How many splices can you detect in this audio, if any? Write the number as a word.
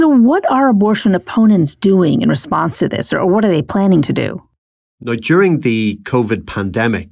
zero